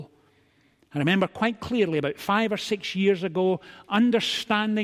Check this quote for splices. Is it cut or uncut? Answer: uncut